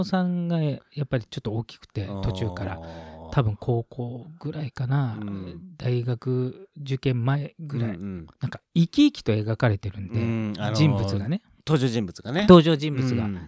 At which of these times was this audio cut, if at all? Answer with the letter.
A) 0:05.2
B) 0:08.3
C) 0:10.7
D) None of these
B